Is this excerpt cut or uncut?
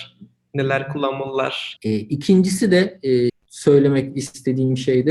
cut